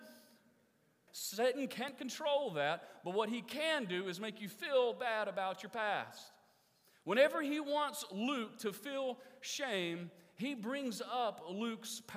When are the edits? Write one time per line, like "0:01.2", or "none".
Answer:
0:01.1